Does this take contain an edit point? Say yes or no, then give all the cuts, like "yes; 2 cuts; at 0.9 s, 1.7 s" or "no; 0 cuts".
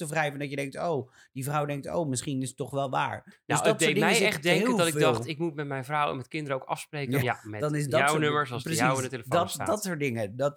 yes; 1 cut; at 7.2 s